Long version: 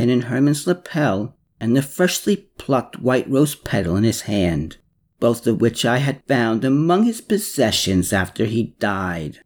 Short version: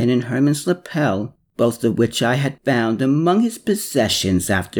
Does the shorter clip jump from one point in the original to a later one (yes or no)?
yes